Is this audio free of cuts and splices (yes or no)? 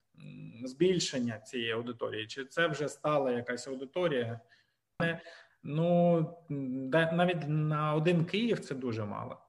no